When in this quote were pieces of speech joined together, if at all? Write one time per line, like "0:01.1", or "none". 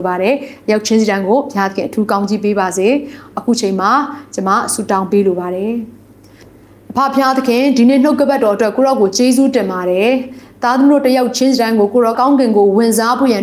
0:12.1